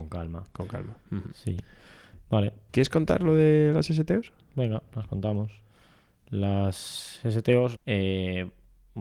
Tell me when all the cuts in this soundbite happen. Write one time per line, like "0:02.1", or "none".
0:02.7
0:07.8